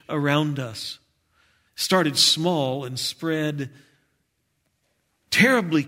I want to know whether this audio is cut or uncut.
cut